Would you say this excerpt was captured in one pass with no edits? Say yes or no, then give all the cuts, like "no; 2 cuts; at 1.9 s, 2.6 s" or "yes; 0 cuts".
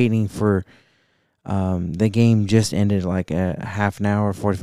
yes; 0 cuts